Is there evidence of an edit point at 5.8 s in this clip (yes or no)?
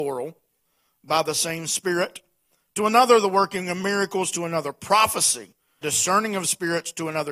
yes